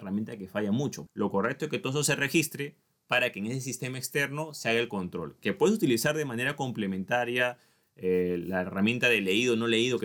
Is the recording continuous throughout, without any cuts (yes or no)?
no